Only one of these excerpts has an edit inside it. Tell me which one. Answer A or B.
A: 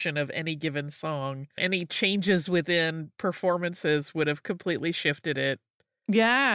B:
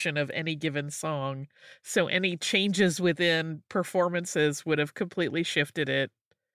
A